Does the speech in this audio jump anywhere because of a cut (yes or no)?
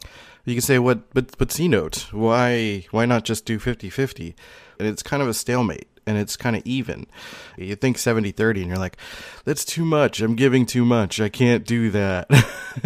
yes